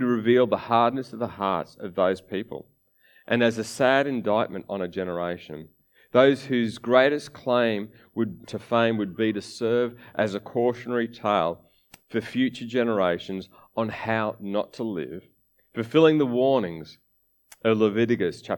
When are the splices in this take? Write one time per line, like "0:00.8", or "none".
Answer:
0:08.4